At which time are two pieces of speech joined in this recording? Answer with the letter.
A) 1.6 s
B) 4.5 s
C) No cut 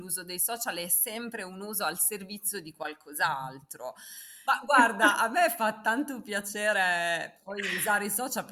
B